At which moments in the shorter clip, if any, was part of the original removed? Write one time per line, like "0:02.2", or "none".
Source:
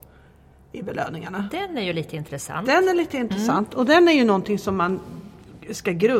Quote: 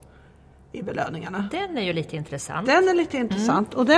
none